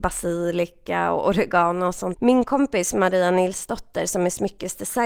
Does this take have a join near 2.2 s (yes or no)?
yes